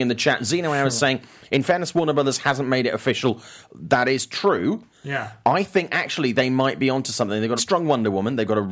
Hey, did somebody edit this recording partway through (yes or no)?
yes